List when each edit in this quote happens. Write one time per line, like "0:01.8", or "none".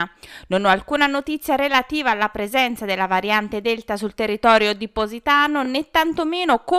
none